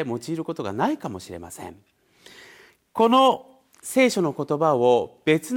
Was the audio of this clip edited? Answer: no; 0 cuts

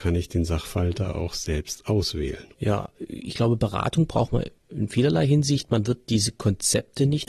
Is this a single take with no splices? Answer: yes; 0 cuts

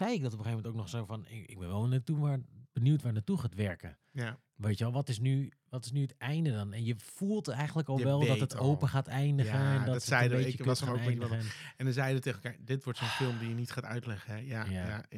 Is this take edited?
no; 0 cuts

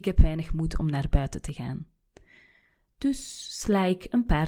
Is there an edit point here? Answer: no; 0 cuts

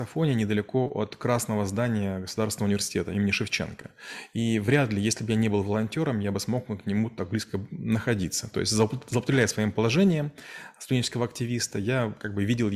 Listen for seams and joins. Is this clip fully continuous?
yes; 0 cuts

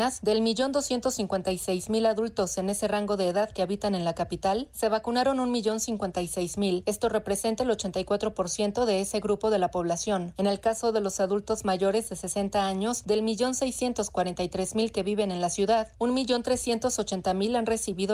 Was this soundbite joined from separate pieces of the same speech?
no; 0 cuts

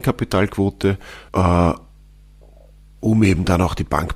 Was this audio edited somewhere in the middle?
yes; 1 cut; at 1.3 s

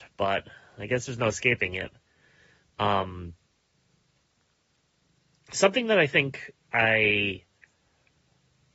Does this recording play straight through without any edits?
yes; 0 cuts

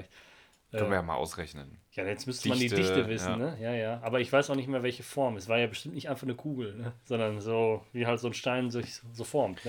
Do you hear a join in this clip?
no; 0 cuts

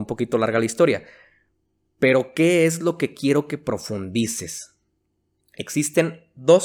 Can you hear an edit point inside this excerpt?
yes; 1 cut; at 5.4 s

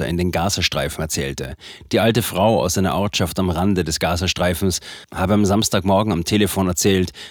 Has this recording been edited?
no; 0 cuts

